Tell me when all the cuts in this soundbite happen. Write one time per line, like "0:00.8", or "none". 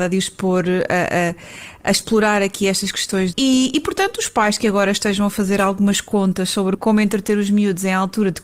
0:03.3
0:06.8